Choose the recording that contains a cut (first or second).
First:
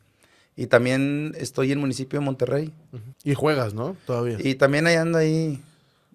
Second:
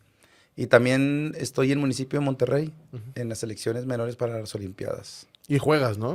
first